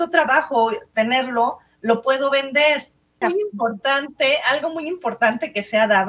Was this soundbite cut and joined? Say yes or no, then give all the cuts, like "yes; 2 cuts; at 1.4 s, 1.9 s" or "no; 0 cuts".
yes; 1 cut; at 3.2 s